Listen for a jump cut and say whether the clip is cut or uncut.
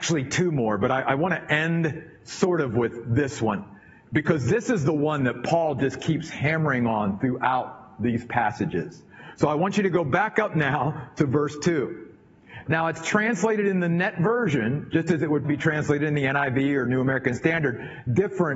cut